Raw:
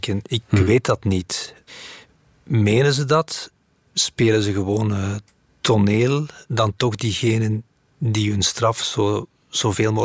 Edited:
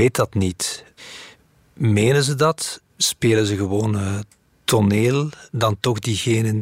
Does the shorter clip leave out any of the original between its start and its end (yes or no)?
yes